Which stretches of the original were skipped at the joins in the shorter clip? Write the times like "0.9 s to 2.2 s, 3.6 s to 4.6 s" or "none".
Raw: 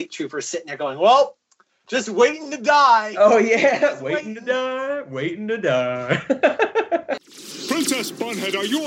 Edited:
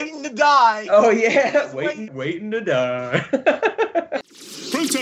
4.4 s to 5.0 s